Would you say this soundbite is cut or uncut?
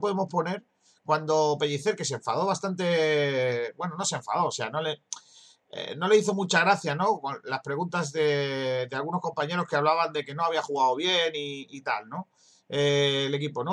uncut